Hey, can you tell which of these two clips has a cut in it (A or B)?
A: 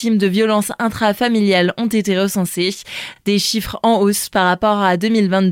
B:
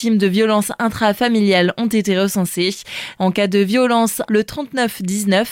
B